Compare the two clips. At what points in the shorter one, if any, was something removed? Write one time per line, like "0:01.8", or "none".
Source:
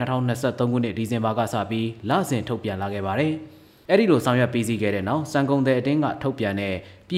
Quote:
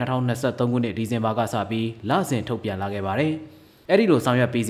none